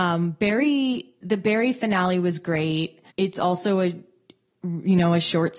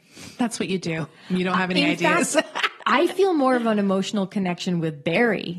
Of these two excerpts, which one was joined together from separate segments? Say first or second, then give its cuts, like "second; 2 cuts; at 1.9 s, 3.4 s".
first; 1 cut; at 3.1 s